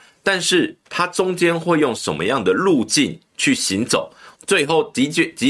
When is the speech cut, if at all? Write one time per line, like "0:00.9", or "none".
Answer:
0:04.4

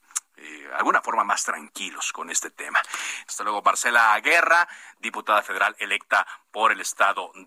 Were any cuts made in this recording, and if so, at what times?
0:03.3

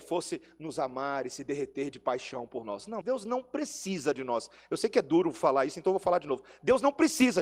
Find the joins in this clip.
0:03.0

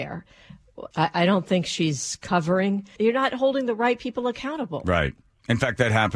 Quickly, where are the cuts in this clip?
0:00.9
0:03.0

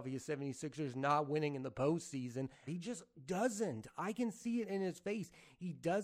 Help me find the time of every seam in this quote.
0:02.7

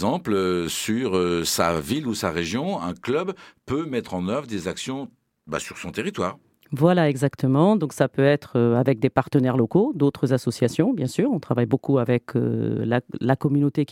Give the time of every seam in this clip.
none

